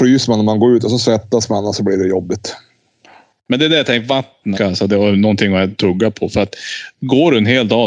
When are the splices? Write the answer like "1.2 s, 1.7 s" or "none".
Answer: 4.6 s